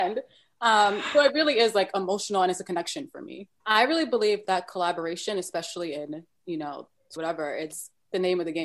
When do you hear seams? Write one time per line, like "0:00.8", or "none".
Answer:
0:03.6
0:07.2